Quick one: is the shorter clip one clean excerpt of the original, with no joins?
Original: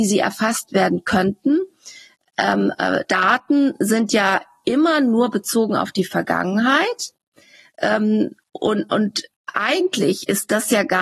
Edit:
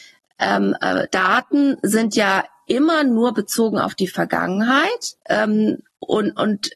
no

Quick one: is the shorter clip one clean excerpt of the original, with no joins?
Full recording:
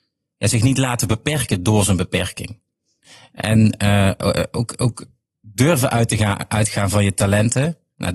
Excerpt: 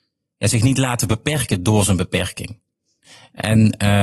yes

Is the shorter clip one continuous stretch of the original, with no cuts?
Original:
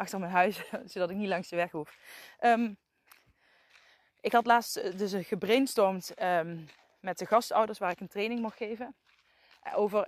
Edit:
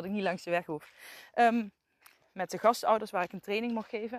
no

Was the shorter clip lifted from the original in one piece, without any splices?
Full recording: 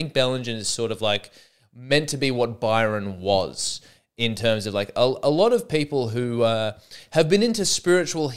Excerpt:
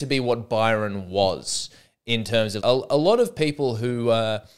no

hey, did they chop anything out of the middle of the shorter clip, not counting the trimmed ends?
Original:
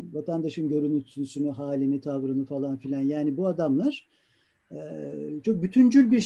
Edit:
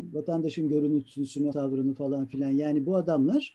yes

